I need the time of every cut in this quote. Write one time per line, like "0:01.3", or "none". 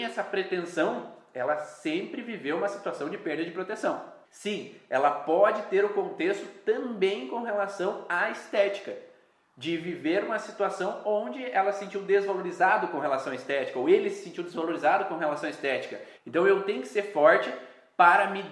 0:04.2
0:16.1